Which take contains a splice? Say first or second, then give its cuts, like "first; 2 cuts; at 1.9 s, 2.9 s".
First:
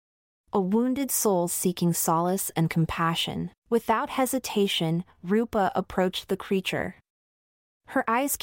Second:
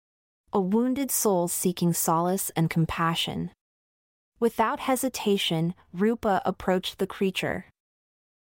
first; 1 cut; at 3.6 s